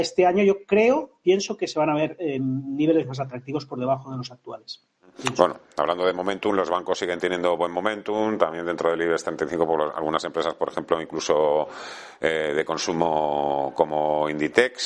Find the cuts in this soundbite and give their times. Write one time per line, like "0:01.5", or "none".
none